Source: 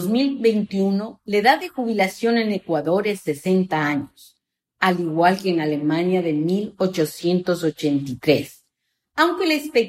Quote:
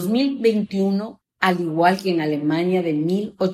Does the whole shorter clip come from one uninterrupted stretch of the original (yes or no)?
no